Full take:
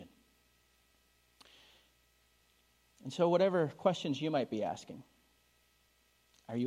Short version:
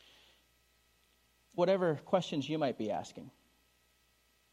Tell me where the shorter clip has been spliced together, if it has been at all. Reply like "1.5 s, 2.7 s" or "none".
1.6 s